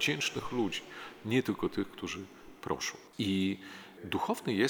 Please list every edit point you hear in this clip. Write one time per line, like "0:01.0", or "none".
0:03.1